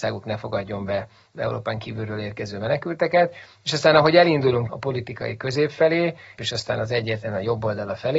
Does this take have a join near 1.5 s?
no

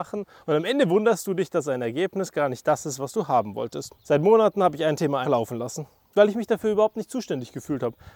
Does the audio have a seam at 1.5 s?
no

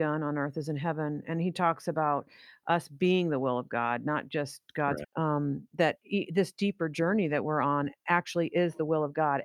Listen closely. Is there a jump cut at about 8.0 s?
no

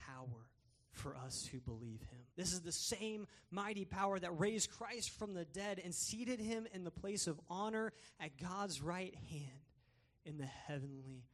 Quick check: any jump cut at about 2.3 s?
yes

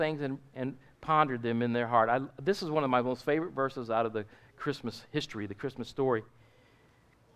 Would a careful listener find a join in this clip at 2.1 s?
no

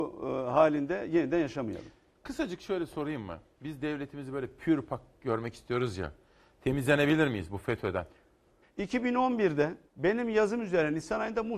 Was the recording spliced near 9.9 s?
yes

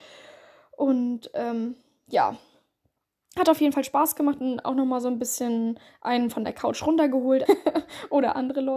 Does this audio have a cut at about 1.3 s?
no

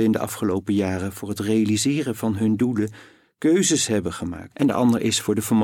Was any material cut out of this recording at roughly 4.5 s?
yes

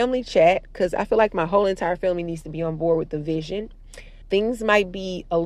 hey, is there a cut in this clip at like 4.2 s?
yes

